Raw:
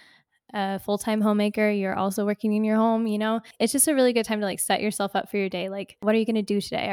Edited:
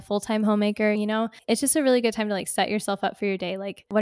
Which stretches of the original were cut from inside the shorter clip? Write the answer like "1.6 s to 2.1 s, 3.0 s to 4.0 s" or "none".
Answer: 1.7 s to 3.1 s